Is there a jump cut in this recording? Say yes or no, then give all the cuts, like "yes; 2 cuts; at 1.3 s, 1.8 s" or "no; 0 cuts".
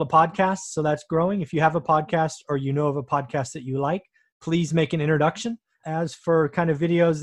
yes; 1 cut; at 5.8 s